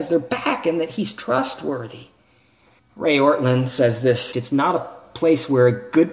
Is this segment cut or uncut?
cut